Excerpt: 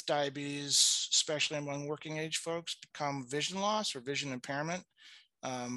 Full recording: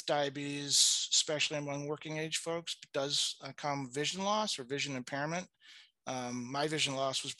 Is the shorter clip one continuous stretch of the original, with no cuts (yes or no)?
no